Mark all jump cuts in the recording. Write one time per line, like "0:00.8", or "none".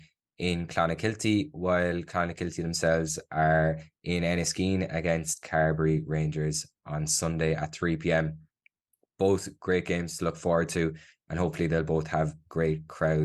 none